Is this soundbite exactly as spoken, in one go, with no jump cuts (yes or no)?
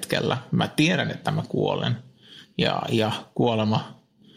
yes